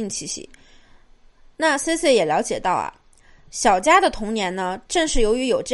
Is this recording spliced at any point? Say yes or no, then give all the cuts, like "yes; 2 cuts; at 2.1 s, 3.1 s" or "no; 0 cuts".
no; 0 cuts